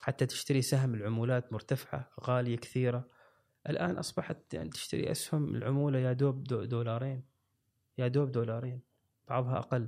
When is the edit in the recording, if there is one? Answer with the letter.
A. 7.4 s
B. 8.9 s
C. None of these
C